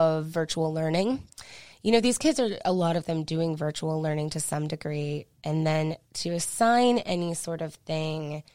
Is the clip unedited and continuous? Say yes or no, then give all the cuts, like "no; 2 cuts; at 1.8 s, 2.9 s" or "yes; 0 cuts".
yes; 0 cuts